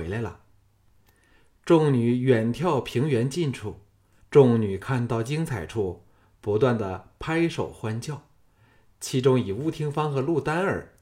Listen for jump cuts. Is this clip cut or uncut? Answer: cut